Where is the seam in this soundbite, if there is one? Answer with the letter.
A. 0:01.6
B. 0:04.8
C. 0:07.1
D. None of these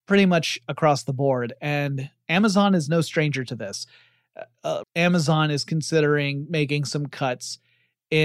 B